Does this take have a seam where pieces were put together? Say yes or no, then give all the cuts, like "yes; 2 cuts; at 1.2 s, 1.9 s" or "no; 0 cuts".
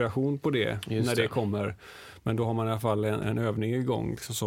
yes; 1 cut; at 3.2 s